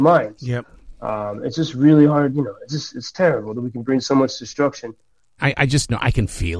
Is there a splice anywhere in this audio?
yes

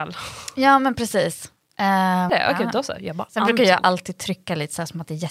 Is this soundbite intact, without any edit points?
no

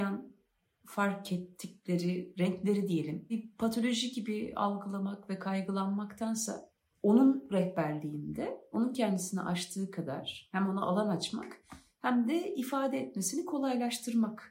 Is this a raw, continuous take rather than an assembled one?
yes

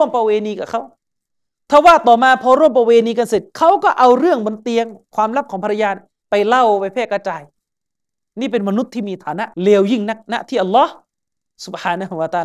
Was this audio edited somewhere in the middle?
yes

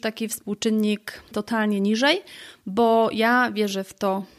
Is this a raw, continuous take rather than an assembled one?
no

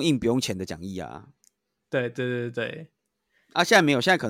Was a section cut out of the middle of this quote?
no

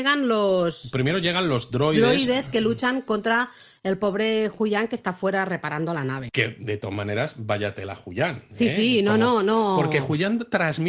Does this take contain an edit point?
yes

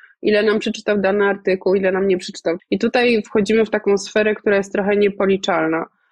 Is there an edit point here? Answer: yes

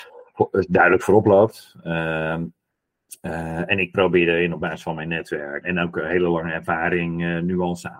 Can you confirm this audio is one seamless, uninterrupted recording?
no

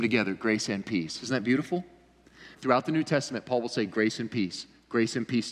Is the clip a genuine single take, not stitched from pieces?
no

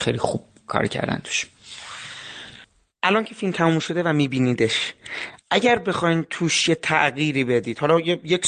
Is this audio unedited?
yes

